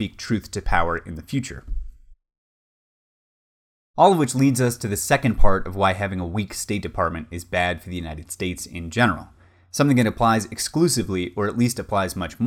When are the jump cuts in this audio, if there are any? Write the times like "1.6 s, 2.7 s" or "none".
none